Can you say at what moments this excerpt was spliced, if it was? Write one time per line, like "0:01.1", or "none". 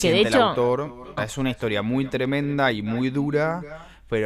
0:01.2